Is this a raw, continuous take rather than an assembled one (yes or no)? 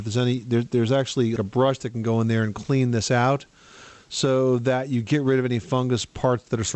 no